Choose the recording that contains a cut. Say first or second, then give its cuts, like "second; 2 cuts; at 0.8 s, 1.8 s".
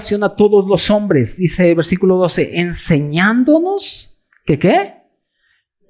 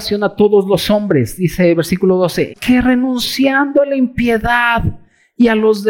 second; 1 cut; at 2.5 s